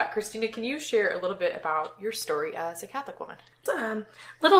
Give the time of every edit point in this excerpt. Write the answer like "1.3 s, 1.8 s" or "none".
3.7 s

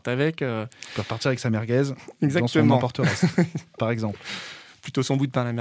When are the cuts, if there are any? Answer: none

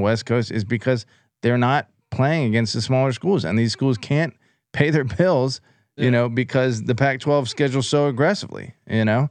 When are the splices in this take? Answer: none

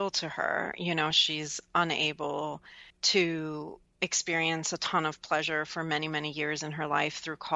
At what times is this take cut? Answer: 1.1 s, 2.9 s

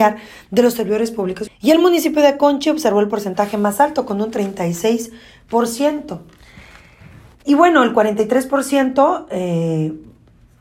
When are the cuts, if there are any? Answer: 1.5 s

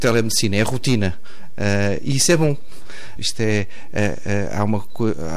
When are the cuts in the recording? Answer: 3.2 s

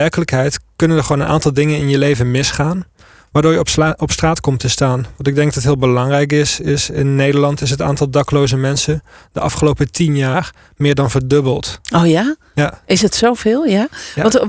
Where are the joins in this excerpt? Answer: none

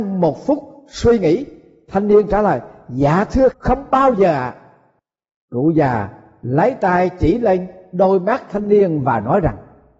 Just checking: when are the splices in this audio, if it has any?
3.5 s

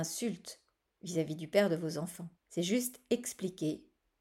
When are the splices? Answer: 2.4 s

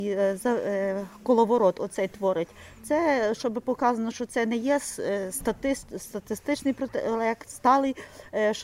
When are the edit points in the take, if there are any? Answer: none

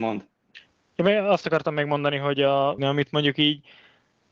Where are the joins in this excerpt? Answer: 2.8 s

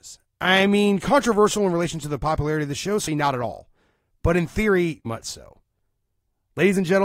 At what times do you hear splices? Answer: 3.1 s, 5.1 s

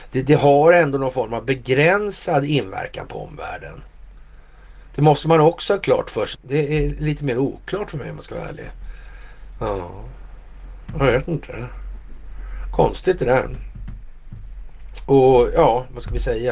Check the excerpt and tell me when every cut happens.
6.3 s

